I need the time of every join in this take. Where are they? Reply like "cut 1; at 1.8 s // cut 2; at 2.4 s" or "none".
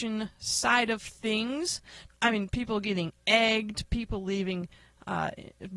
cut 1; at 2.1 s